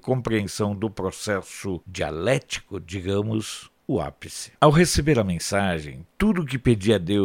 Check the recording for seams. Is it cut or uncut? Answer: uncut